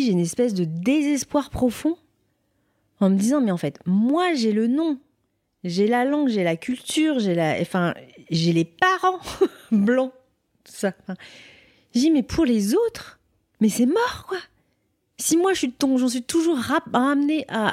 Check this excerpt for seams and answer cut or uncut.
uncut